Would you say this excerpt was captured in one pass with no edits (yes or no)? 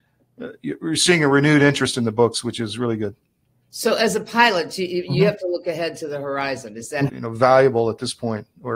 no